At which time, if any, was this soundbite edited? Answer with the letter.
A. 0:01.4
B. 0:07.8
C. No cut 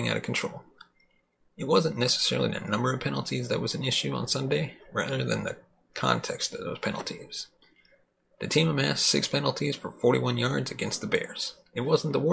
C